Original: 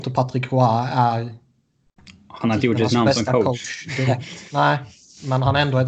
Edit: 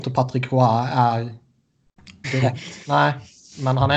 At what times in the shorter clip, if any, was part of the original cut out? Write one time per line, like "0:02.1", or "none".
0:02.2

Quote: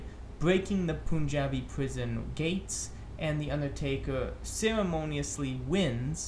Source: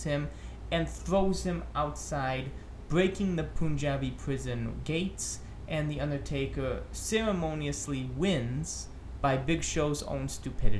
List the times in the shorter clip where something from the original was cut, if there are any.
none

